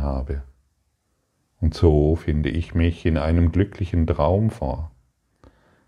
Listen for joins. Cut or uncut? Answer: cut